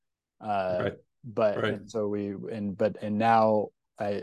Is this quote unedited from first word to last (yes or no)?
yes